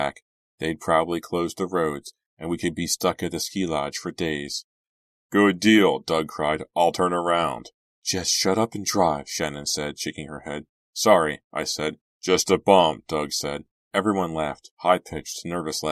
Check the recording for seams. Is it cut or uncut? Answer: cut